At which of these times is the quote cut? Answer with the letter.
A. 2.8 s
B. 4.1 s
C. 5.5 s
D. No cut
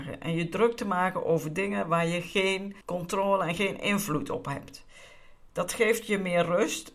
A